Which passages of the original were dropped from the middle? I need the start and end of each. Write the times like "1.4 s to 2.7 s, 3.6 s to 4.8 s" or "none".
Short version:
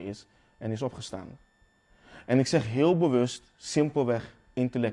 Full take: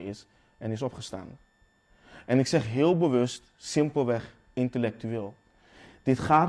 none